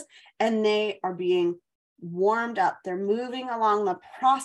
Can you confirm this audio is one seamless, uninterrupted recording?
yes; 0 cuts

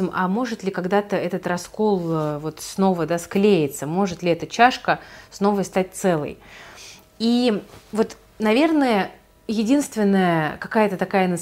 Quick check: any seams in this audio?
no; 0 cuts

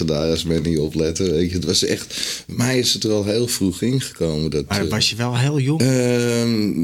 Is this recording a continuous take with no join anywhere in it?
no; 1 cut; at 5.8 s

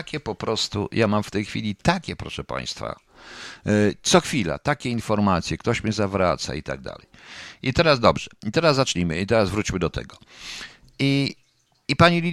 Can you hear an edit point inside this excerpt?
no; 0 cuts

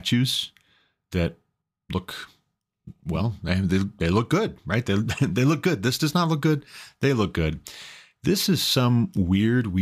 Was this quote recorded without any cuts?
yes; 0 cuts

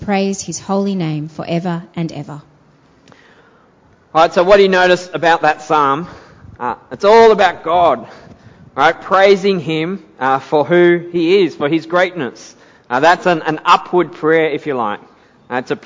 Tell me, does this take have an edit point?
no; 0 cuts

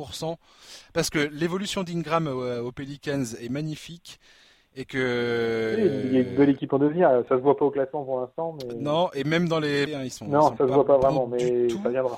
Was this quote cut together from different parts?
yes; 1 cut; at 9.9 s

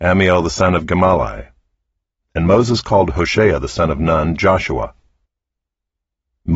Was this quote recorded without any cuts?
no; 1 cut; at 2.2 s

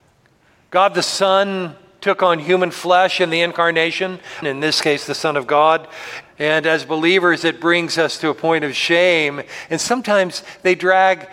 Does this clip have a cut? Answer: yes; 2 cuts; at 4.4 s, 6.2 s

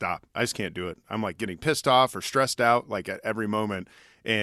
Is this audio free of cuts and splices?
yes; 0 cuts

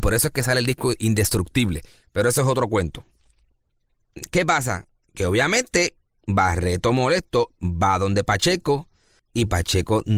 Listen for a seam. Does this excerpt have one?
no; 0 cuts

